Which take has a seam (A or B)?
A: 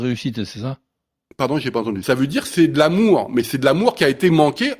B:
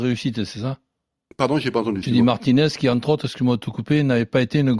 A